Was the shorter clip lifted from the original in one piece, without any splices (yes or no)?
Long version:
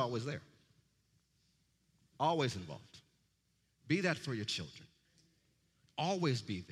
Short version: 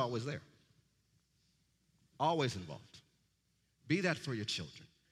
yes